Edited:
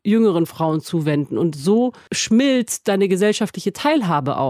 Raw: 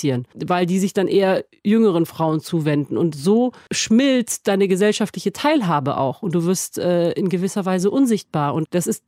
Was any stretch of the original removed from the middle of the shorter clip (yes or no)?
no